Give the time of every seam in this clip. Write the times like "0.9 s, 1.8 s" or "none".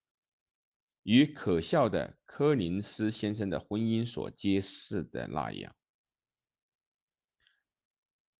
none